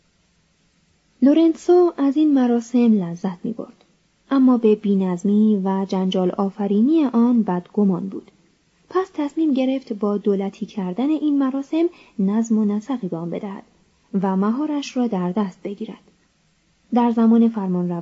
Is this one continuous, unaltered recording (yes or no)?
yes